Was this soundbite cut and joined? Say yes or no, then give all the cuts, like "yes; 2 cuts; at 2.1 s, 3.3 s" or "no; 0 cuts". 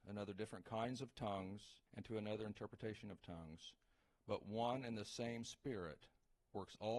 yes; 1 cut; at 1.9 s